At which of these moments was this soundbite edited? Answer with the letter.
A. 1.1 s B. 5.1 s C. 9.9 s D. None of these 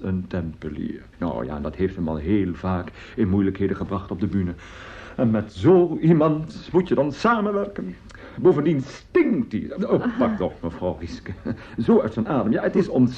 A